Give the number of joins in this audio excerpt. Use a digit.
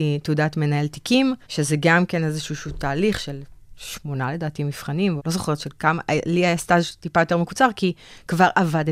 2